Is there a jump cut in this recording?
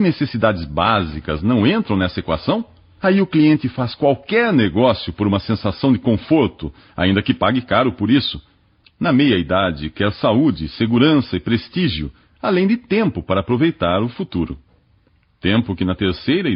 yes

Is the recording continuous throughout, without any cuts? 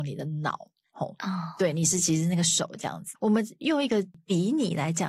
no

